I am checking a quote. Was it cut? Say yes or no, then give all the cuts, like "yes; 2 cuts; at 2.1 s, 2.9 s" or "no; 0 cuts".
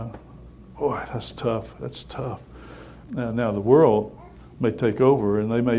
yes; 1 cut; at 3.0 s